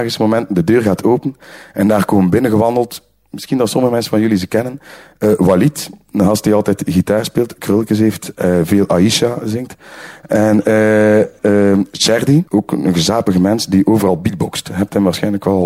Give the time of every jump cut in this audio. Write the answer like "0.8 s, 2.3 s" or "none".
11.4 s, 12.5 s